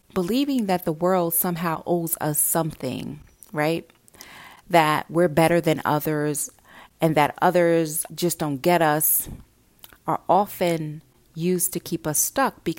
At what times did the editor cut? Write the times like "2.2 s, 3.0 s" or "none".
none